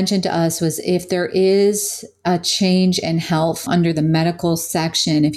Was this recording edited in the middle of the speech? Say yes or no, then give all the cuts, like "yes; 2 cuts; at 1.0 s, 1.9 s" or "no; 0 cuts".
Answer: yes; 1 cut; at 3.7 s